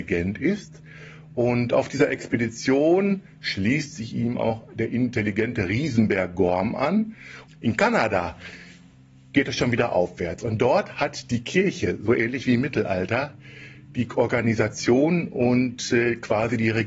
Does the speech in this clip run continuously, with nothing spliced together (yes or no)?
no